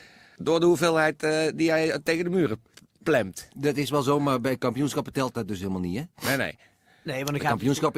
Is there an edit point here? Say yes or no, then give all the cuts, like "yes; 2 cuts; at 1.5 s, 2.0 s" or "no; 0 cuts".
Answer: no; 0 cuts